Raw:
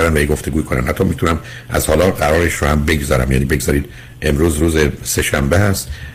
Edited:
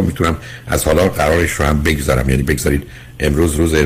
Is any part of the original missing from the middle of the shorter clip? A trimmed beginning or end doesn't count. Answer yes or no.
no